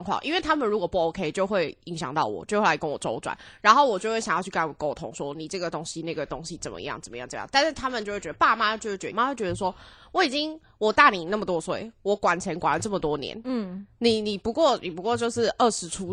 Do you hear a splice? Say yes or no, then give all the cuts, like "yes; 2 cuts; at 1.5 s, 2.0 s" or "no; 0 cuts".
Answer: yes; 1 cut; at 9.1 s